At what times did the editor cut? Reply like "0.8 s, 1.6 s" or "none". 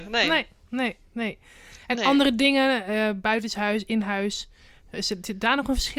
none